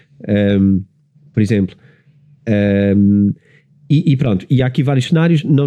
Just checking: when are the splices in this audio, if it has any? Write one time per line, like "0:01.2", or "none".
none